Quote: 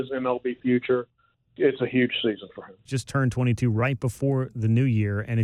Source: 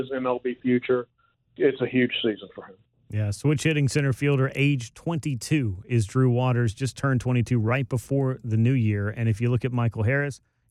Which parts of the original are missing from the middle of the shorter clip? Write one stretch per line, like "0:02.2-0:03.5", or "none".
0:02.9-0:06.7